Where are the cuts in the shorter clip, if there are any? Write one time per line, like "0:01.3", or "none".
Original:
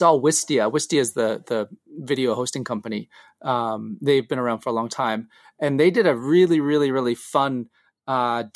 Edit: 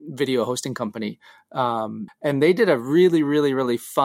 0:02.1